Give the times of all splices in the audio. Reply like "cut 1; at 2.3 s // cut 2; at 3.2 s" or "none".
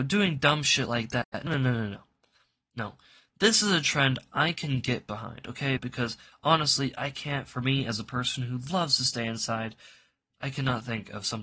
cut 1; at 5.8 s